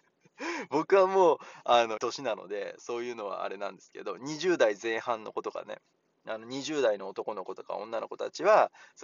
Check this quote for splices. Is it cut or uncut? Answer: cut